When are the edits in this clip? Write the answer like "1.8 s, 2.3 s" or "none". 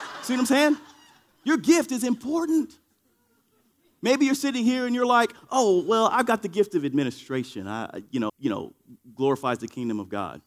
8.3 s